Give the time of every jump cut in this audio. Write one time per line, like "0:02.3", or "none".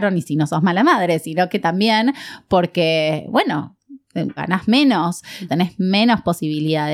0:04.4
0:05.5